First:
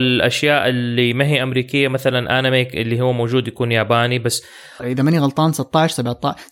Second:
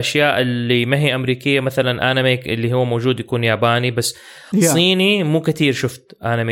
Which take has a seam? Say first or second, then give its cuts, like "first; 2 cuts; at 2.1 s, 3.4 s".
first; 1 cut; at 4.8 s